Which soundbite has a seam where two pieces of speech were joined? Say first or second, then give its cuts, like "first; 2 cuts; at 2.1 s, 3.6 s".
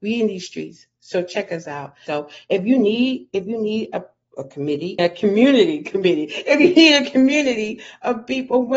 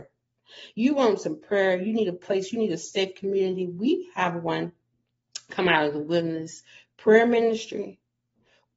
first; 2 cuts; at 2.1 s, 5.0 s